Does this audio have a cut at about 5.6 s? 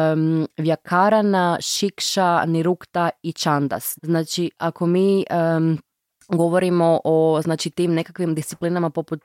no; 1 cut; at 4.0 s

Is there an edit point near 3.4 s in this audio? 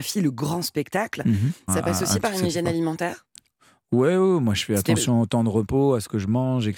no; 1 cut; at 1.7 s

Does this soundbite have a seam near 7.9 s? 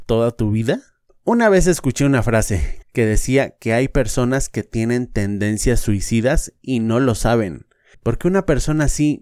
yes; 3 cuts; at 1.1 s, 2.8 s, 7.9 s

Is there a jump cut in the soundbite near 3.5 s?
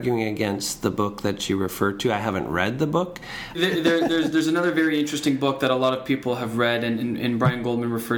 yes; 1 cut; at 3.5 s

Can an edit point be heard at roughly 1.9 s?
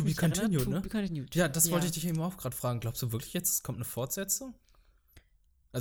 no; 0 cuts

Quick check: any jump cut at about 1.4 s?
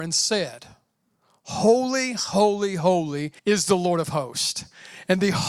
no; 1 cut; at 3.4 s

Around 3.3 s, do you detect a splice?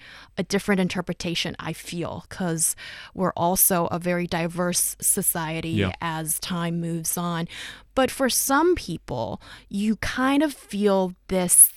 no; 0 cuts

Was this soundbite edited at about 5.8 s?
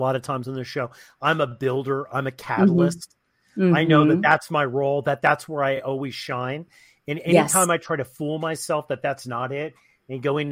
no; 0 cuts

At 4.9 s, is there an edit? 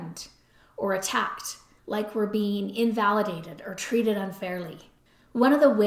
no; 1 cut; at 1.8 s

